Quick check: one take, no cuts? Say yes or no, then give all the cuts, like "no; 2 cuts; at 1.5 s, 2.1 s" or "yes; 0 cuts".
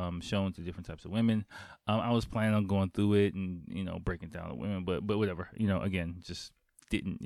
yes; 0 cuts